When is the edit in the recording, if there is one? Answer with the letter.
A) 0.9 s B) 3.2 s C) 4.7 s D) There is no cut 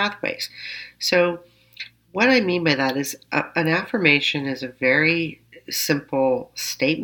D